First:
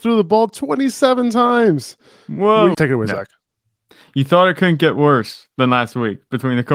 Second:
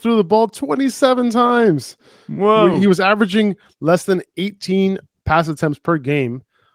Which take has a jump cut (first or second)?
first